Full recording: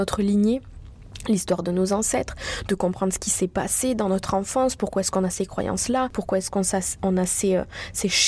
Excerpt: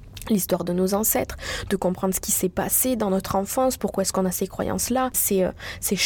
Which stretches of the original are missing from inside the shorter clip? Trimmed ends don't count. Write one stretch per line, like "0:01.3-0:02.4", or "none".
0:06.1-0:07.3